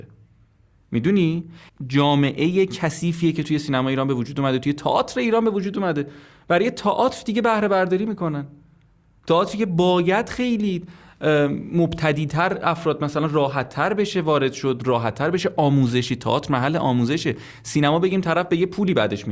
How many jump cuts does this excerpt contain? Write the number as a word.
one